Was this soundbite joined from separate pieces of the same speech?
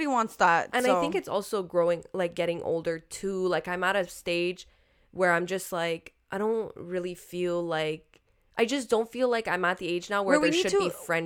no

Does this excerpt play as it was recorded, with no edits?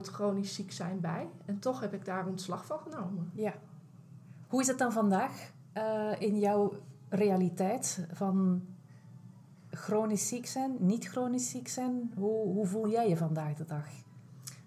yes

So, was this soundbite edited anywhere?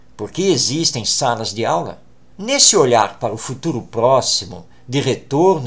yes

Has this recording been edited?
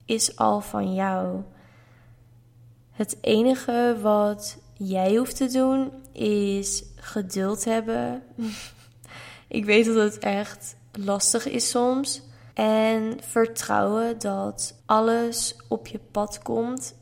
yes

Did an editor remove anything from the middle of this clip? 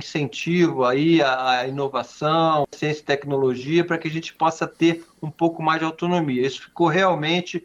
no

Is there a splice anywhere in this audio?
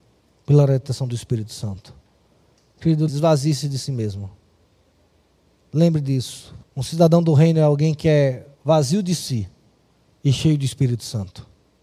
yes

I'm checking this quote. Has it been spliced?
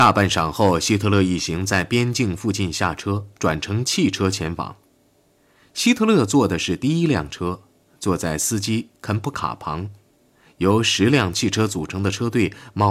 no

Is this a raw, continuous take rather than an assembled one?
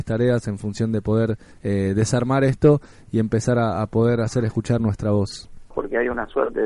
no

